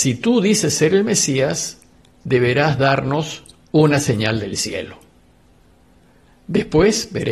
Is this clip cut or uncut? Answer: uncut